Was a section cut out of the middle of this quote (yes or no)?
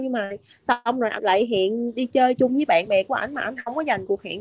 yes